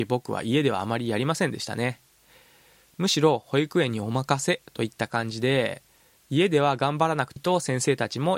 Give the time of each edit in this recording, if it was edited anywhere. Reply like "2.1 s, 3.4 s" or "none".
7.4 s